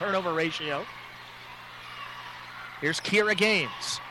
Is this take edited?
no; 0 cuts

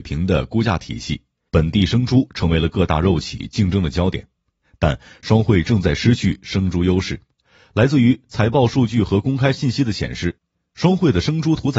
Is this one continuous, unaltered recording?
no; 1 cut; at 1.5 s

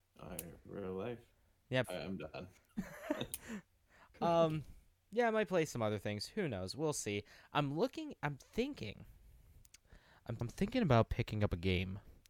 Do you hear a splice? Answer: yes; 2 cuts; at 1.8 s, 10.4 s

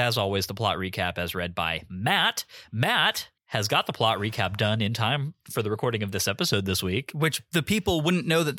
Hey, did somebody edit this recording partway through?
yes; 1 cut; at 3.4 s

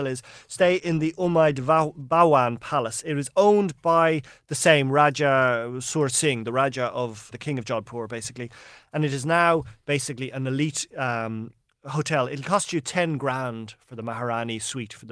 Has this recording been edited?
yes; 2 cuts; at 7.3 s, 8.9 s

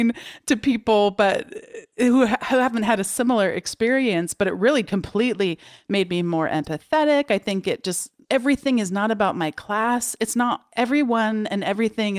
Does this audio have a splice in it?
yes; 2 cuts; at 4.8 s, 8.2 s

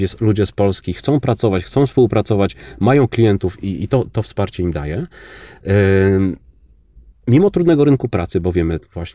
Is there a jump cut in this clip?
no; 0 cuts

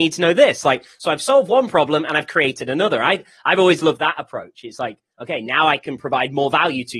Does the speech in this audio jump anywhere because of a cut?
no; 0 cuts

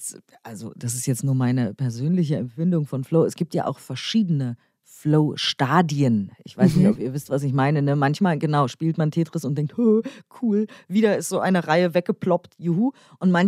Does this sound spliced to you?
no; 0 cuts

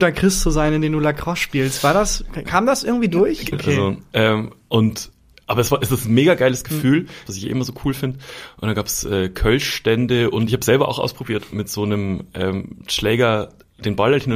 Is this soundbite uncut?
no; 2 cuts; at 3.5 s, 7.3 s

